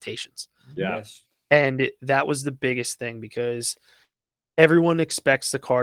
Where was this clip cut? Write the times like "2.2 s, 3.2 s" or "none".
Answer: none